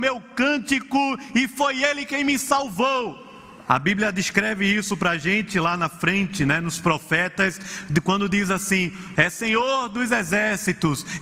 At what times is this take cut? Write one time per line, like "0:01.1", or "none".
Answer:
0:03.6
0:09.1